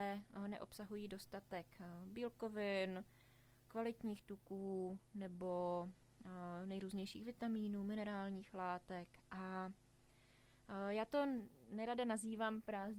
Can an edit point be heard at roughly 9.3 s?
no; 0 cuts

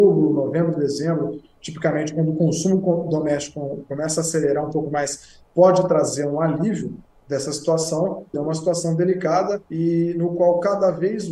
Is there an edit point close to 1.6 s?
no; 3 cuts; at 5.4 s, 8.3 s, 9.7 s

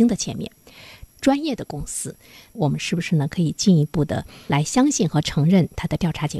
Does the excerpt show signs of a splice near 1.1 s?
yes; 1 cut; at 1.1 s

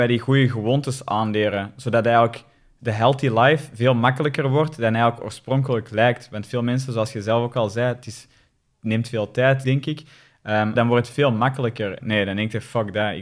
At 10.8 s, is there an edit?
yes; 3 cuts; at 9.6 s, 10.8 s, 12.0 s

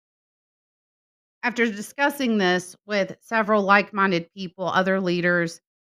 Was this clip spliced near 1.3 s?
yes; 1 cut; at 1.3 s

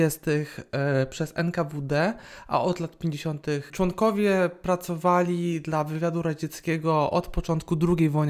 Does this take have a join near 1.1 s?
no; 1 cut; at 3.7 s

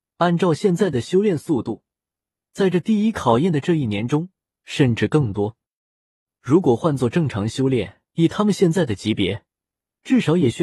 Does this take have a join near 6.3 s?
no; 2 cuts; at 4.6 s, 8.1 s

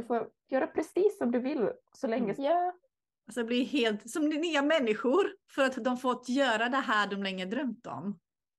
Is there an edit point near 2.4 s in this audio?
yes; 1 cut; at 2.4 s

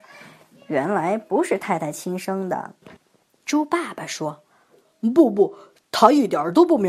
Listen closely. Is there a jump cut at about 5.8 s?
no; 1 cut; at 2.8 s

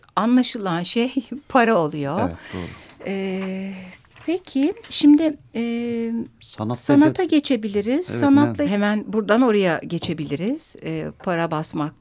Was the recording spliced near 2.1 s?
no; 1 cut; at 8.6 s

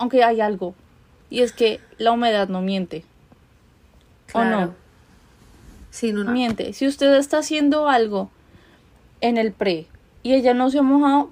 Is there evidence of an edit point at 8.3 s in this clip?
no; 1 cut; at 6.3 s

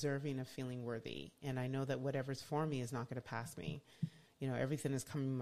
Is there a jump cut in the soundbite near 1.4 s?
no; 0 cuts

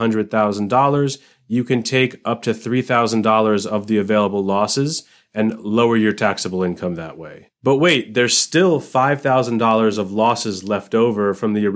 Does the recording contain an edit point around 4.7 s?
no; 1 cut; at 7.6 s

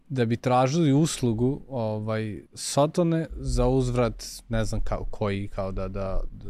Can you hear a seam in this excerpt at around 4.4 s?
no; 1 cut; at 2.5 s

